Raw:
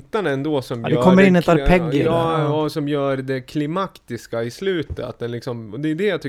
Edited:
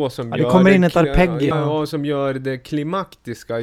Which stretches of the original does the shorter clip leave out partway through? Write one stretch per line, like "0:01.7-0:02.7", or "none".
0:02.0-0:02.3